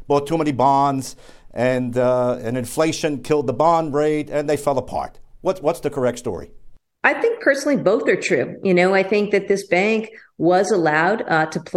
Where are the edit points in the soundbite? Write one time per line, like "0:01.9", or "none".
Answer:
none